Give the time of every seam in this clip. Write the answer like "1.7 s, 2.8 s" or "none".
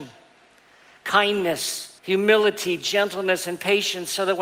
2.0 s